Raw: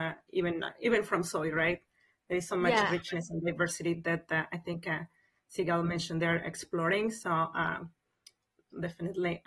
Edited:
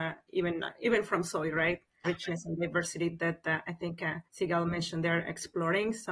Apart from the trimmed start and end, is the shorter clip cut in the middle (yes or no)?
yes